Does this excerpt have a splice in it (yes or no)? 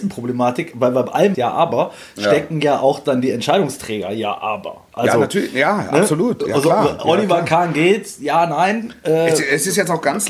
yes